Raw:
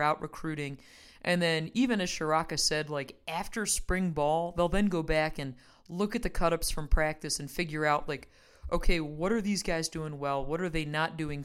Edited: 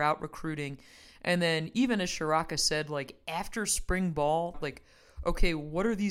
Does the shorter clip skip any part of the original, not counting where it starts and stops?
yes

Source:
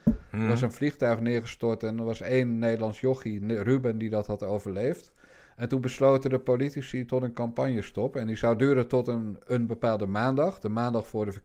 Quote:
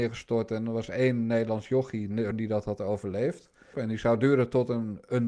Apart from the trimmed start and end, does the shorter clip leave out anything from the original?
yes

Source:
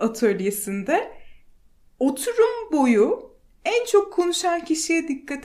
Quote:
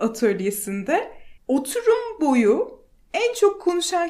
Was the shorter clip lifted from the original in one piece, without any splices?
no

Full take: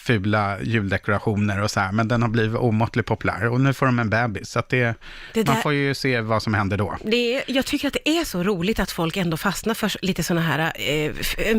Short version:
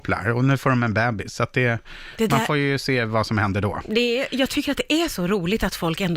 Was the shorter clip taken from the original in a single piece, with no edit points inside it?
yes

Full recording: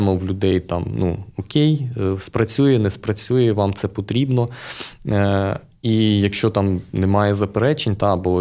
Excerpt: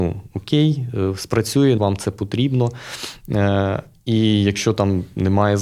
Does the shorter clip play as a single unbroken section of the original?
no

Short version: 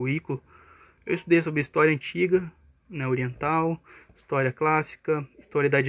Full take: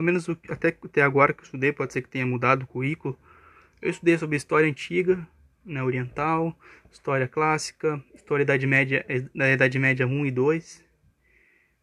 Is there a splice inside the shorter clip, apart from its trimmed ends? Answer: no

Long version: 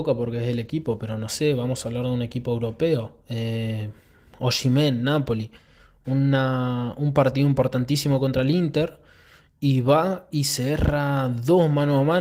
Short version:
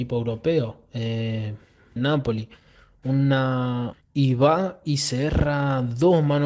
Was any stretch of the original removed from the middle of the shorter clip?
yes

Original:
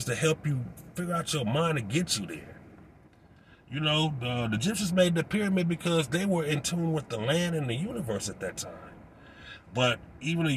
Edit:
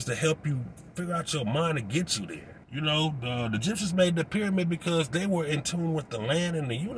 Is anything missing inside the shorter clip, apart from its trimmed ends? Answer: yes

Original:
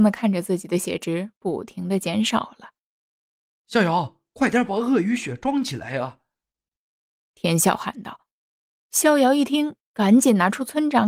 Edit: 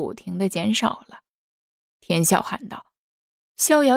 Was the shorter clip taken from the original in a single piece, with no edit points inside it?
no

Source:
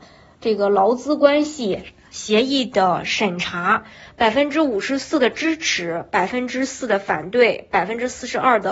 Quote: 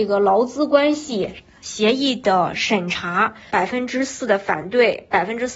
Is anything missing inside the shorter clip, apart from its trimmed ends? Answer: yes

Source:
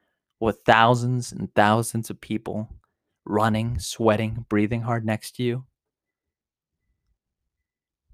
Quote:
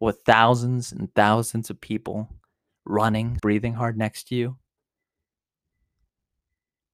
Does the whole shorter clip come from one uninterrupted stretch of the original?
no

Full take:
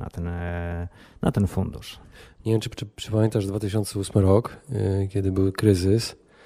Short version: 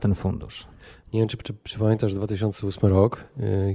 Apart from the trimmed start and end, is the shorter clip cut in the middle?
no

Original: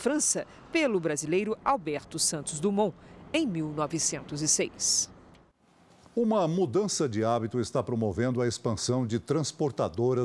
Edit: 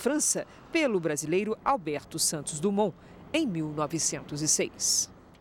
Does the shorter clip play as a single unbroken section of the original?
yes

